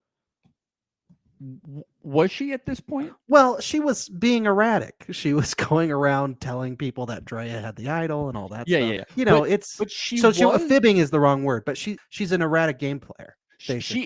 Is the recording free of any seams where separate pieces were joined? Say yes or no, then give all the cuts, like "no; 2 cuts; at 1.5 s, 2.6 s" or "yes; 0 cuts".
no; 2 cuts; at 9.0 s, 12.0 s